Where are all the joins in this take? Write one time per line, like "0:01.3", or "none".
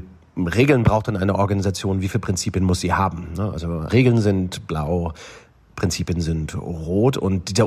0:03.9